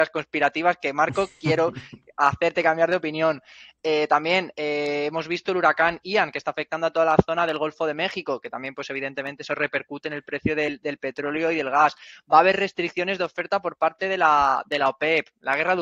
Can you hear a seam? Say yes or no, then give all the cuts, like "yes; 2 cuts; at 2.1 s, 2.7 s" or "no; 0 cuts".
no; 0 cuts